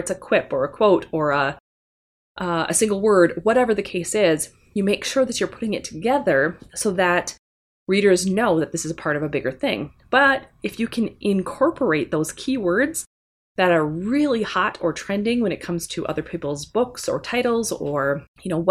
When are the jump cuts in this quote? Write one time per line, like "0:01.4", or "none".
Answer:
none